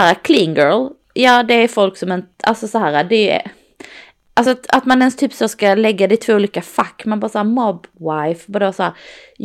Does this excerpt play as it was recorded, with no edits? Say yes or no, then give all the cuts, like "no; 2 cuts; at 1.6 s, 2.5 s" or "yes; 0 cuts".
yes; 0 cuts